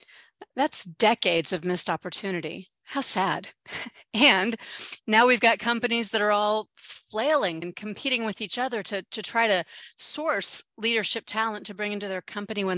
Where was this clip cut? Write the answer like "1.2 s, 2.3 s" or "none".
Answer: 7.6 s